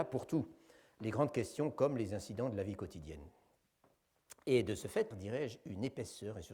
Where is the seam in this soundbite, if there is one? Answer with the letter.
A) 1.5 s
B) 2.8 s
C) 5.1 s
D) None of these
C